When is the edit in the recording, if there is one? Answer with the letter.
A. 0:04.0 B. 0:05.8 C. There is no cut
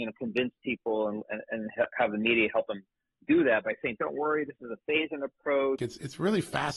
B